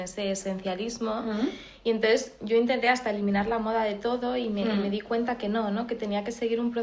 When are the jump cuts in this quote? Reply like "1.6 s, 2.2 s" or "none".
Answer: none